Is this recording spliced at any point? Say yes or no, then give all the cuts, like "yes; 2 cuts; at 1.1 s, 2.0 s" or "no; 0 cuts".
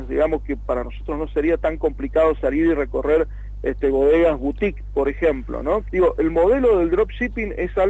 yes; 1 cut; at 5.9 s